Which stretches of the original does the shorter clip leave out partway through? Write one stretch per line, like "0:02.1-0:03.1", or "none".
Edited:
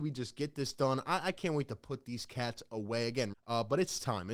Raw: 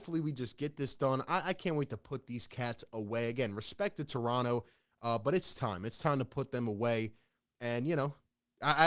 0:03.5-0:04.9